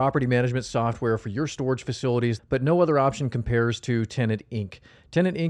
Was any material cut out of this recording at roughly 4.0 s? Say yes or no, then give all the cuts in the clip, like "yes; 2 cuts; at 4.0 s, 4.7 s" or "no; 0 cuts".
no; 1 cut; at 2.4 s